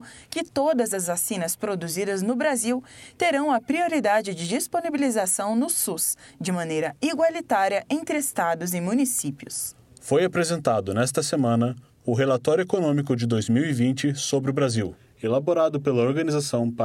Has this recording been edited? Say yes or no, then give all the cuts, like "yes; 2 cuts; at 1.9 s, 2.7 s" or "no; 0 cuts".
no; 0 cuts